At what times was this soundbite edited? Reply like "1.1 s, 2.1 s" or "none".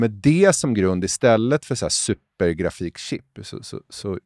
none